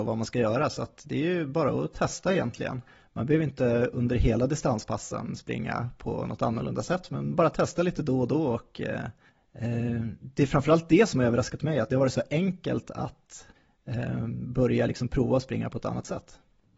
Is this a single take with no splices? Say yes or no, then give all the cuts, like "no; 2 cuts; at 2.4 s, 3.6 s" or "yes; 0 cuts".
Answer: no; 1 cut; at 11.9 s